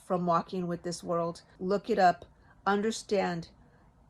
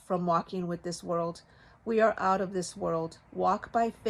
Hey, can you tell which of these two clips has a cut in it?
first; 1 cut; at 1.6 s

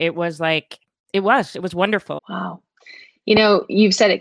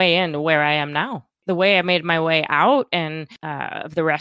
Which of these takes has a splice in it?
first; 1 cut; at 2.2 s

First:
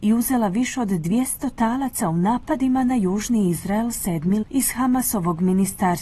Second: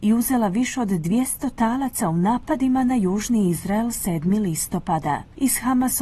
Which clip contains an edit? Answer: first; 1 cut; at 4.4 s

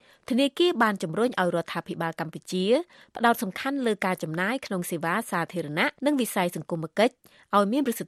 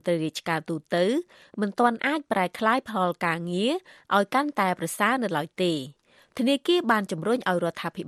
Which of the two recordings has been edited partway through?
first; 1 cut; at 6.0 s

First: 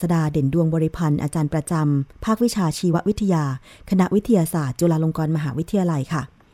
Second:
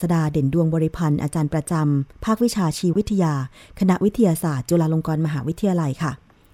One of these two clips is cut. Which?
second; 1 cut; at 2.9 s

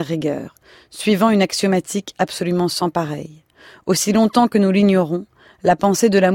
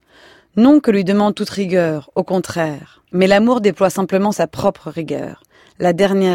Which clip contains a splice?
second; 1 cut; at 3.1 s

